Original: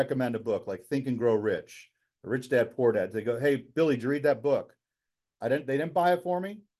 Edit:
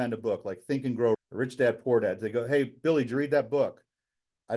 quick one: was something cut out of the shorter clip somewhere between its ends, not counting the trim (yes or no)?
yes